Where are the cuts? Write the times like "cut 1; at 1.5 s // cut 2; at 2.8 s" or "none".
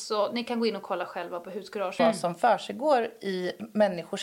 cut 1; at 2.0 s